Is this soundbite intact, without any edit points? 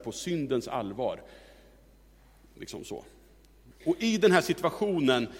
no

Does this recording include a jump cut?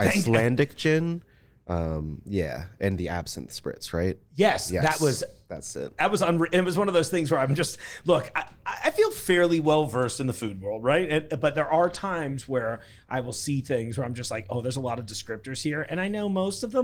no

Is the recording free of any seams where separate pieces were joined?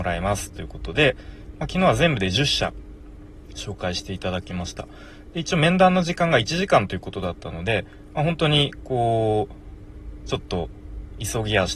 no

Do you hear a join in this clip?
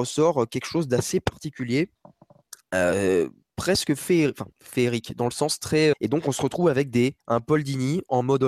yes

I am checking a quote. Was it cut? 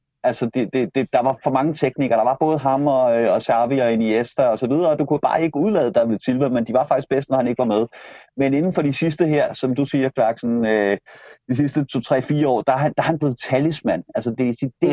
no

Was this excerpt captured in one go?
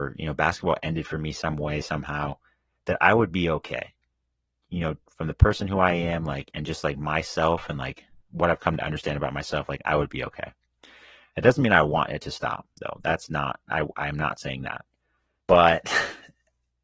no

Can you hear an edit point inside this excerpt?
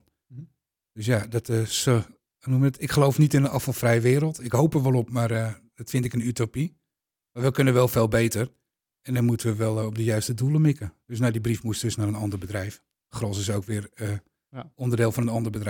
yes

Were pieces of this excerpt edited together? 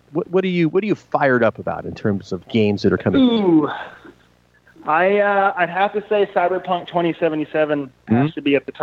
no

